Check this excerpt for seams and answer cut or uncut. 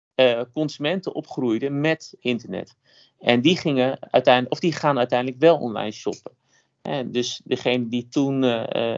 cut